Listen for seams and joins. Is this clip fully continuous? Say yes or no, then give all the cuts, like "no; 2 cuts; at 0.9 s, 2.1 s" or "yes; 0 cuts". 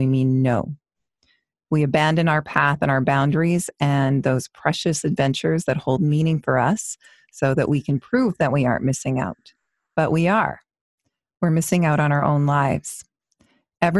yes; 0 cuts